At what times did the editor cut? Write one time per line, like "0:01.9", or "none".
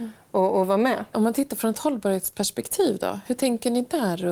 0:01.1